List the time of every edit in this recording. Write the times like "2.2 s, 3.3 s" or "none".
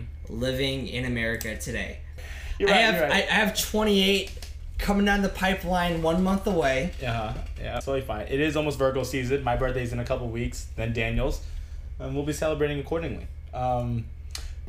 none